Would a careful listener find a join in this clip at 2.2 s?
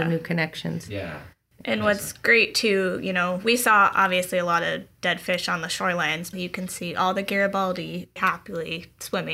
no; 2 cuts; at 6.3 s, 8.2 s

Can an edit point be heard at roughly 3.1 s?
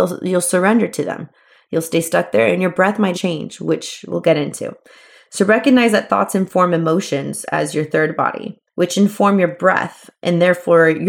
yes; 2 cuts; at 3.1 s, 8.7 s

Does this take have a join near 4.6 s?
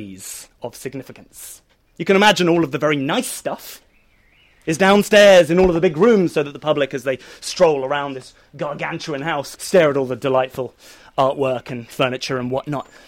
no; 1 cut; at 9.6 s

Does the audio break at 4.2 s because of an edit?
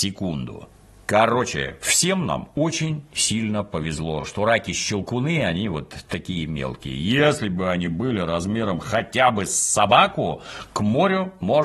no; 0 cuts

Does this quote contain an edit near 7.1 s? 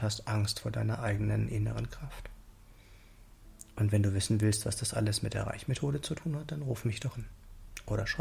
yes; 1 cut; at 7.1 s

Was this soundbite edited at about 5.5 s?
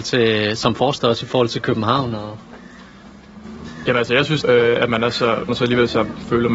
yes; 2 cuts; at 4.4 s, 5.5 s

